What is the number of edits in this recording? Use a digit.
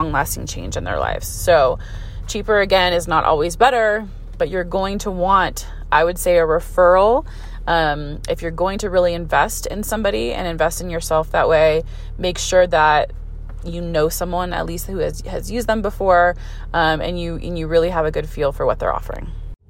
0